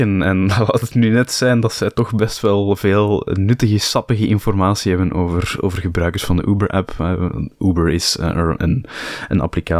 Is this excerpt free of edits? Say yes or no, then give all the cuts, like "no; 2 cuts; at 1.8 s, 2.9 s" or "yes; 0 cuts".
no; 1 cut; at 8.6 s